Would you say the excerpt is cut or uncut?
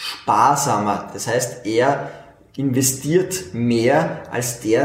uncut